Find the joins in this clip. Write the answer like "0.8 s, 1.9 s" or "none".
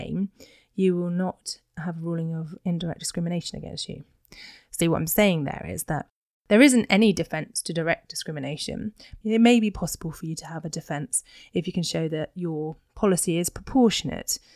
4.8 s, 9.2 s